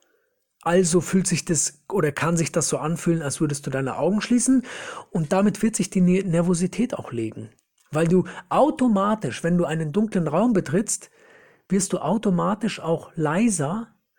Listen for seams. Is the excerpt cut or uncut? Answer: uncut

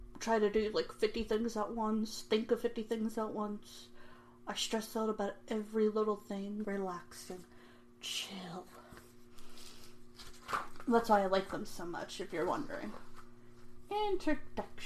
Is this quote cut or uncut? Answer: cut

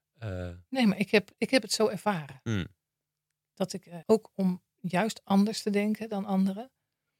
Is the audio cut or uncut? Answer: cut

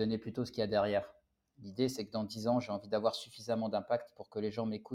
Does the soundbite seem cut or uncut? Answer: uncut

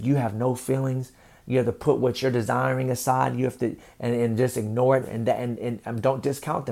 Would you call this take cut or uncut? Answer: cut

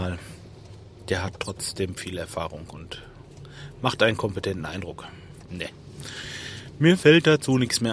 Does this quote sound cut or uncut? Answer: cut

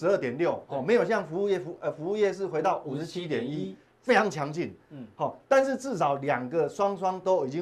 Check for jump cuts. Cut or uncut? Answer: uncut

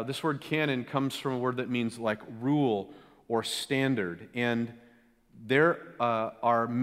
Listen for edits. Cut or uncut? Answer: uncut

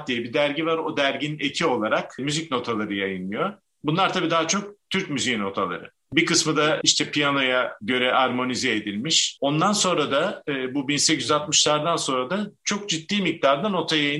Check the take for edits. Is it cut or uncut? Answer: cut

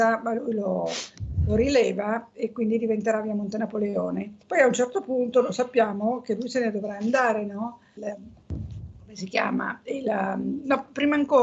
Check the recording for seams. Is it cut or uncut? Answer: cut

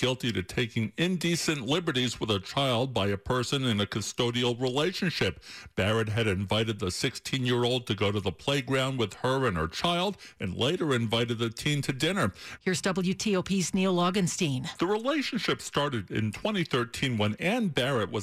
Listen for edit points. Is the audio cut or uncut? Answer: cut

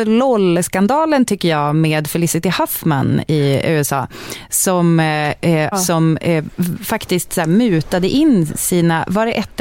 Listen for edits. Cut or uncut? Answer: cut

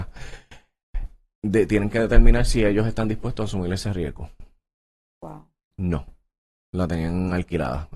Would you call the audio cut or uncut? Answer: cut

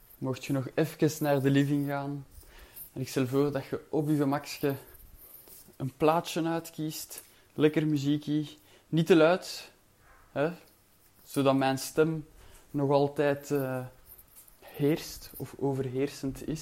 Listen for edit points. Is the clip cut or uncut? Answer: uncut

